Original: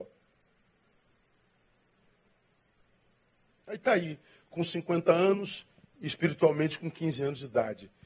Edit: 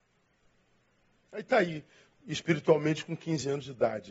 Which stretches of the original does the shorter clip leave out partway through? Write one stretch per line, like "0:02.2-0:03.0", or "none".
0:04.5-0:05.9